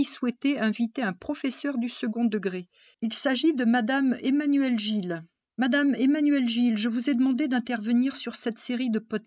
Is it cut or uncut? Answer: uncut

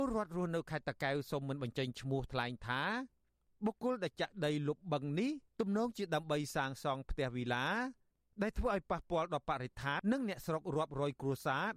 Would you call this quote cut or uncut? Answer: cut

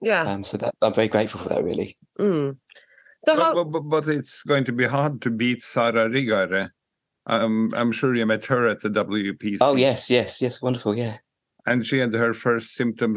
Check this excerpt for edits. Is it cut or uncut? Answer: cut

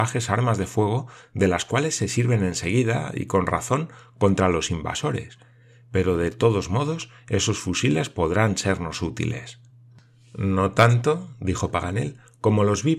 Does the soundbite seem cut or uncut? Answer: uncut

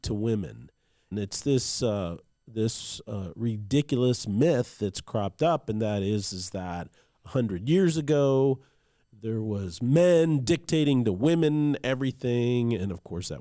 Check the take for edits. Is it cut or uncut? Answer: cut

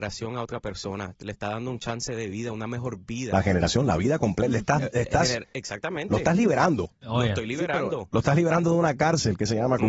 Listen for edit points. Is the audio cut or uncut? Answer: uncut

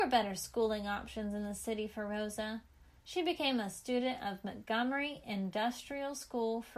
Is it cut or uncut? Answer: uncut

